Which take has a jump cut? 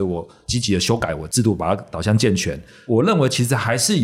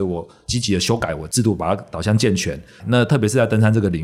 second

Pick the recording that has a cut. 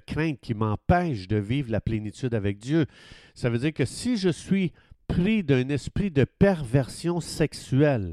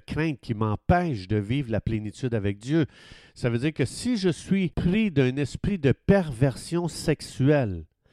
second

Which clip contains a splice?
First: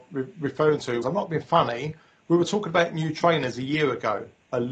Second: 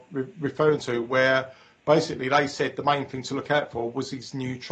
first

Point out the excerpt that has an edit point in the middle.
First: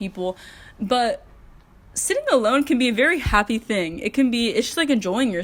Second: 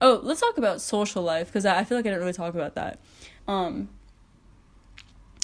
second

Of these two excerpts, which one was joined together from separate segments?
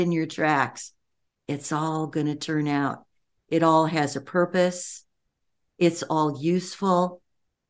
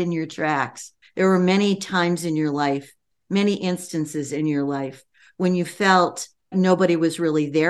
second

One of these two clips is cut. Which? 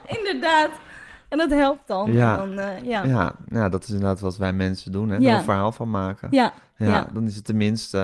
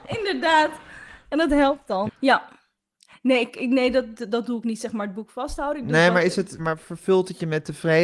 second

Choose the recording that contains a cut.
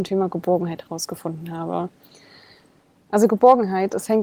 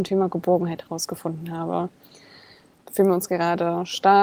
second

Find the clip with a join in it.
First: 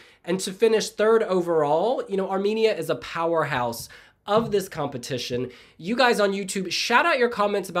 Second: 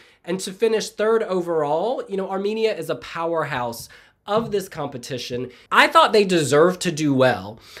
second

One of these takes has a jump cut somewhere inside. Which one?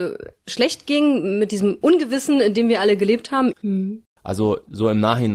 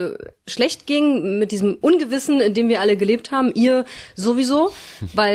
first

